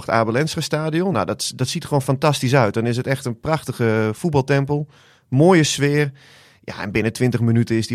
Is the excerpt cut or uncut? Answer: uncut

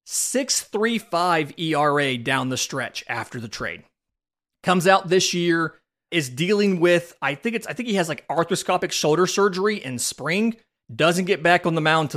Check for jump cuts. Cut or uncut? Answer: uncut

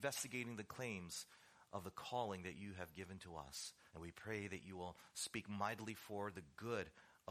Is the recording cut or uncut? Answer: cut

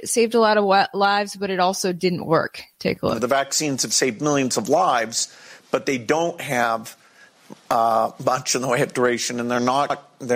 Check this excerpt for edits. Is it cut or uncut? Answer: uncut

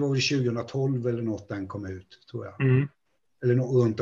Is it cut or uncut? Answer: uncut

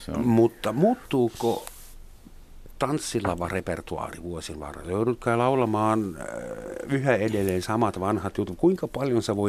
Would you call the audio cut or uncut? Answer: uncut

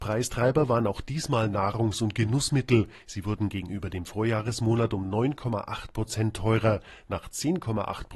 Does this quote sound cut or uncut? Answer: uncut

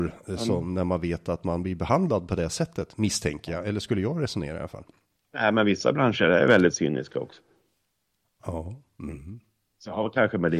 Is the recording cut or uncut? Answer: uncut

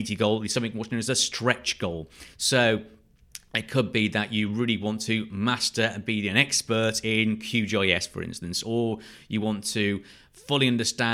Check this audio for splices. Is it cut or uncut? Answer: uncut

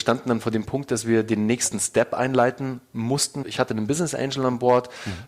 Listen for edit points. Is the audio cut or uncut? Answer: cut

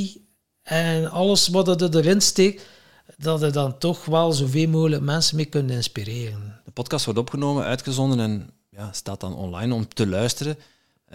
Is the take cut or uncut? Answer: cut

